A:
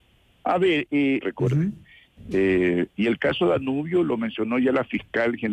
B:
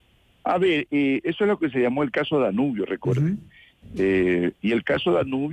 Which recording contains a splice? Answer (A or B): A